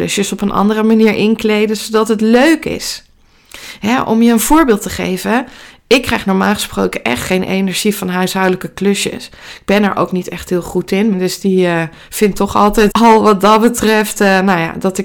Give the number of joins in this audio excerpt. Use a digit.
2